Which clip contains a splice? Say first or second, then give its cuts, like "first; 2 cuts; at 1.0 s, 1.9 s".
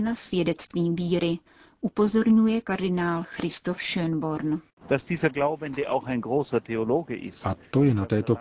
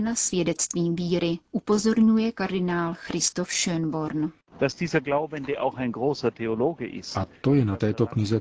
second; 1 cut; at 1.5 s